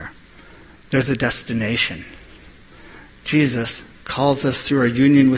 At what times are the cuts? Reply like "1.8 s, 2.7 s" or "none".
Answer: 4.0 s